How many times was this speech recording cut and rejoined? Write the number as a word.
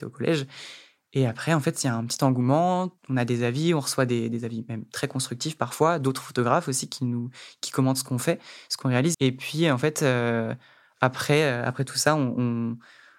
one